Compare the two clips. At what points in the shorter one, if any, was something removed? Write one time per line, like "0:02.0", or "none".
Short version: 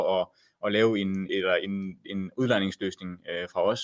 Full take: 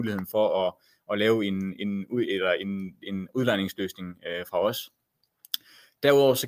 0:01.3